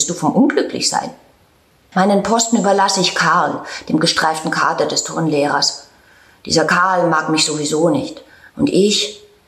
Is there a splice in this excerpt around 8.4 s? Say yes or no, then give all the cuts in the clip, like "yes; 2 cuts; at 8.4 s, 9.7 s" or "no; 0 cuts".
no; 1 cut; at 1.9 s